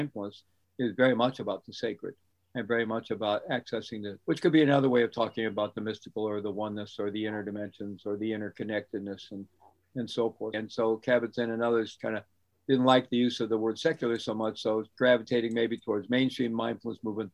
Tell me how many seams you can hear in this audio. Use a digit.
2